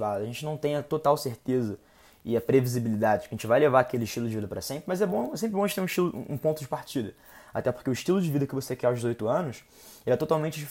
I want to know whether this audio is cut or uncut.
uncut